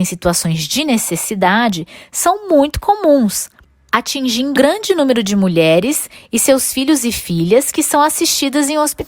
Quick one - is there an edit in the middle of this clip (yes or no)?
yes